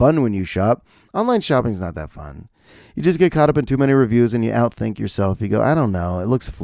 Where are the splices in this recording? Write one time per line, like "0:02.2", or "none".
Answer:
none